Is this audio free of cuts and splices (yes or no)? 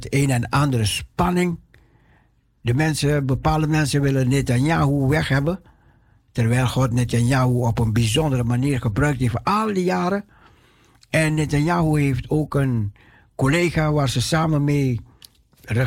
yes